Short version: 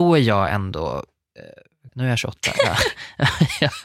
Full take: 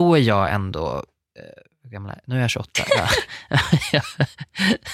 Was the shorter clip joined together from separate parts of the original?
yes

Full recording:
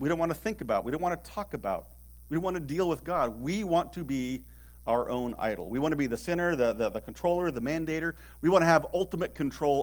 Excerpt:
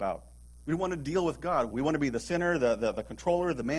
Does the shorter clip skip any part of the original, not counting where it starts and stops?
yes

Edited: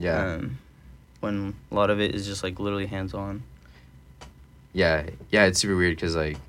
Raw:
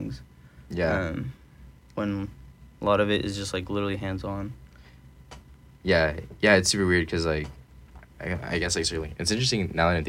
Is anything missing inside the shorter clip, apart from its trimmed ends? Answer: yes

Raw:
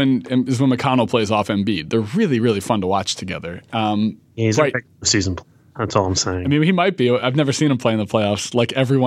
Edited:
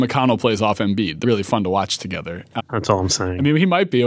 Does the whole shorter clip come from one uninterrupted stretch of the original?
no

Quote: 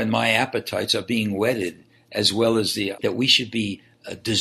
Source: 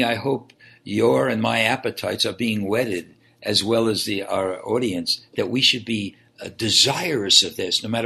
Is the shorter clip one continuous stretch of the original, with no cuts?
no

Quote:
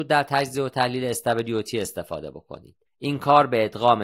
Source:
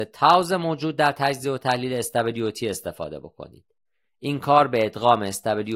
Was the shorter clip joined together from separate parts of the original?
yes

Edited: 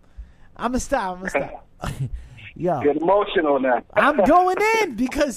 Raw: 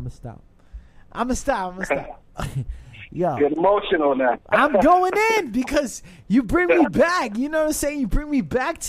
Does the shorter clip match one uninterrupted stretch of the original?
yes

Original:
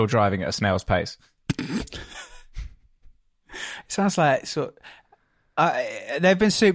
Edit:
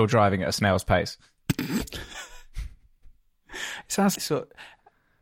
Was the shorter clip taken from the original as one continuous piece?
no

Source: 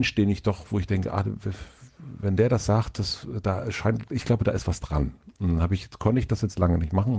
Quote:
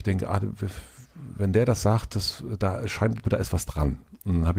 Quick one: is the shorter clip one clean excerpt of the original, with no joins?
no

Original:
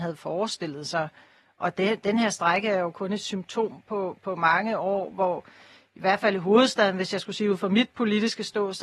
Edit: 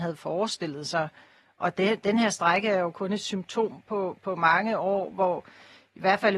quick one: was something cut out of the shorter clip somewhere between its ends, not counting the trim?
no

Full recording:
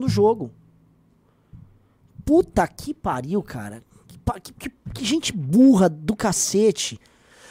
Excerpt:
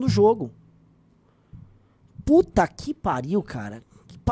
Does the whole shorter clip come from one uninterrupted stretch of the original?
yes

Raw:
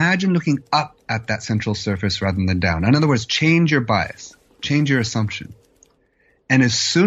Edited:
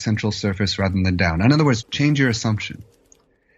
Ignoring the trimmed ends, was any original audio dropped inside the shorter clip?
yes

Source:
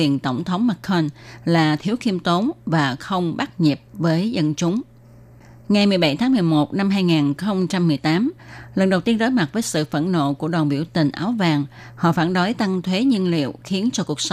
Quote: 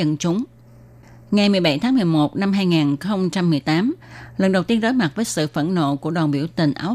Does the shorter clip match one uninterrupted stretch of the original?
yes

